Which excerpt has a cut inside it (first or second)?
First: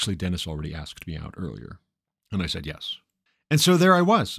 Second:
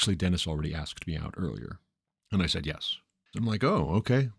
second